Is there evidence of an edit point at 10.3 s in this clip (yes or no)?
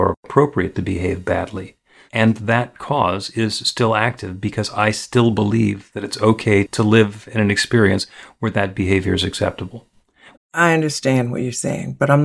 yes